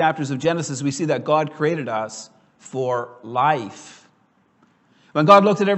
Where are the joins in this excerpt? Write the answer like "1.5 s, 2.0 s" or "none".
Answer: none